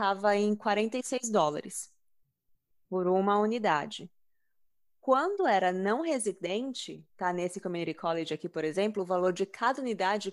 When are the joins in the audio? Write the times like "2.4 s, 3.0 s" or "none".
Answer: none